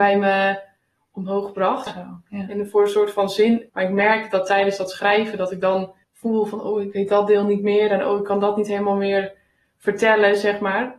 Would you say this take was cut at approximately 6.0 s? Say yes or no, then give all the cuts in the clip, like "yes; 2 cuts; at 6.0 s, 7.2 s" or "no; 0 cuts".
yes; 3 cuts; at 1.9 s, 3.7 s, 6.0 s